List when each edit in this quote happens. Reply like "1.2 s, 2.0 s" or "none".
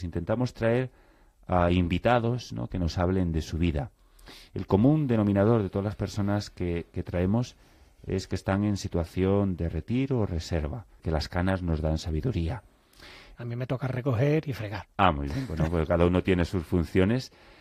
11.0 s, 13.3 s